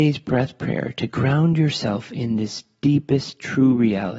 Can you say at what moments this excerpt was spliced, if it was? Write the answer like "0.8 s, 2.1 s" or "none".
none